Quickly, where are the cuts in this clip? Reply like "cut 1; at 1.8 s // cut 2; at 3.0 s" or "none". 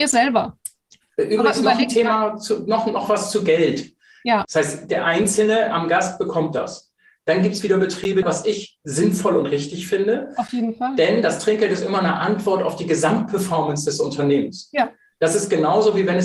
cut 1; at 4.4 s // cut 2; at 8.2 s